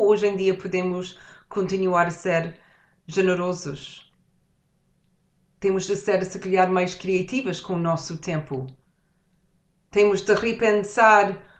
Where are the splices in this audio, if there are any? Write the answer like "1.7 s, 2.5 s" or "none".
none

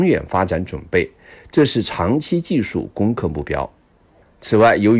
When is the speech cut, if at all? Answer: none

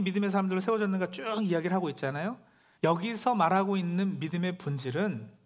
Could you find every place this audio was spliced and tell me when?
2.8 s

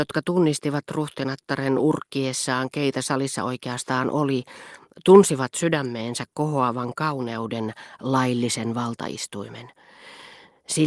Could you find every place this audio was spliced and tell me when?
none

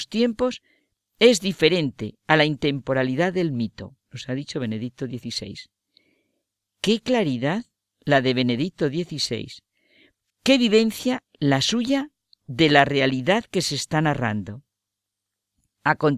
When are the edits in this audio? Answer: 10.3 s

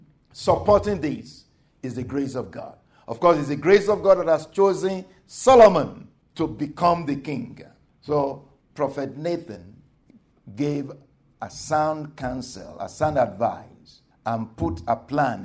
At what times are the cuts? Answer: none

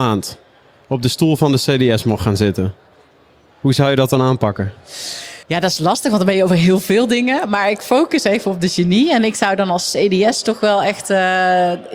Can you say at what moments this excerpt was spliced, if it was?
5.4 s

